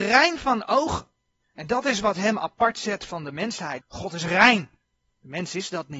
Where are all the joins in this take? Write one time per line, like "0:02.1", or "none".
0:03.8